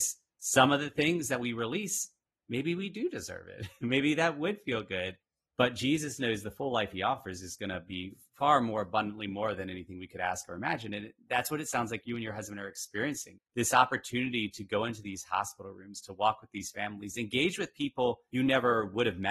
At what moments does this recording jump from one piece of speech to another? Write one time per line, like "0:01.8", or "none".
none